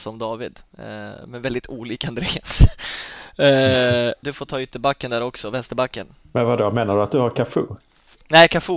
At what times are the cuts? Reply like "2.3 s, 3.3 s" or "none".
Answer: 4.2 s